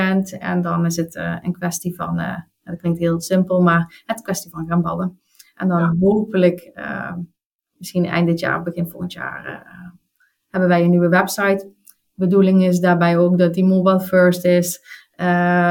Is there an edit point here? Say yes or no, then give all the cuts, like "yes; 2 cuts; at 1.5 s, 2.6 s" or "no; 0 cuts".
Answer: no; 0 cuts